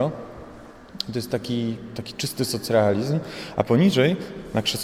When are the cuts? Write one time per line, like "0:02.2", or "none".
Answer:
none